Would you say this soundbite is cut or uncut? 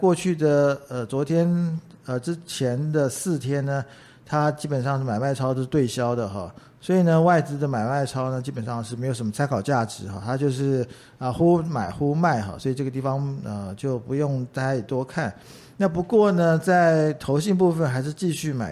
uncut